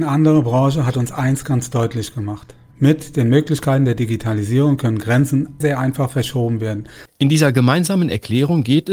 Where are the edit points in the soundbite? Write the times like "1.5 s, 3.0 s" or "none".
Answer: 5.6 s, 7.1 s